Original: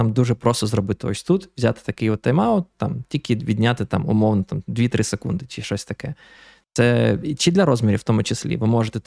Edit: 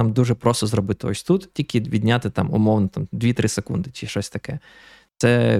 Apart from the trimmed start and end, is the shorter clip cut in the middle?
yes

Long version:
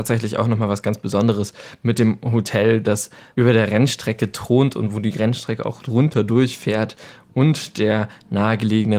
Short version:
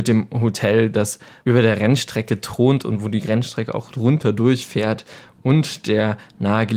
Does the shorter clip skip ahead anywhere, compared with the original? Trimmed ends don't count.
no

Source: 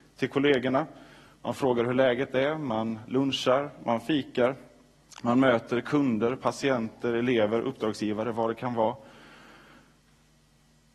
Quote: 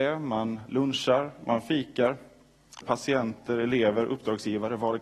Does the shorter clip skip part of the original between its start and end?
yes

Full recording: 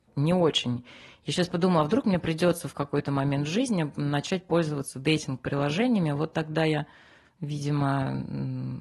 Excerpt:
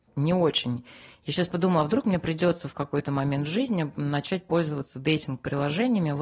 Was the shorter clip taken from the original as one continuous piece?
yes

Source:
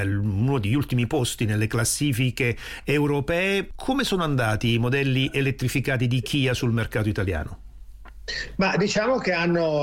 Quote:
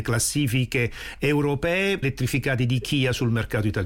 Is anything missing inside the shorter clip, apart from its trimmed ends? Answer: yes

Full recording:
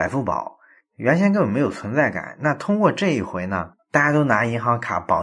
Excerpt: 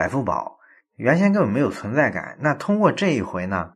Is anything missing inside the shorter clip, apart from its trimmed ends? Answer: no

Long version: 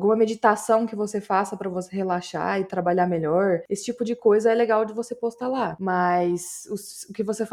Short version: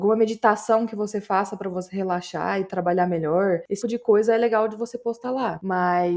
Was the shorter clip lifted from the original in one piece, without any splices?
no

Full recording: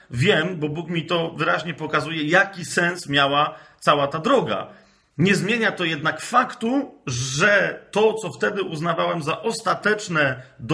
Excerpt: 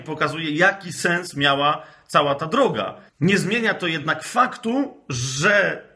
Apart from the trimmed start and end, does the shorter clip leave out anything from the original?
yes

